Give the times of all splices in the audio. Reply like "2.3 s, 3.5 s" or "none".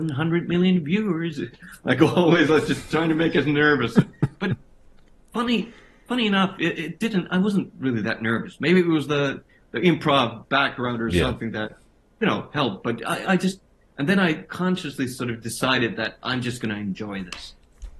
none